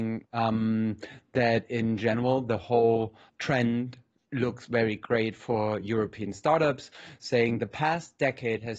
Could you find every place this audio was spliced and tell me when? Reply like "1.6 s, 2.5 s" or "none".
3.3 s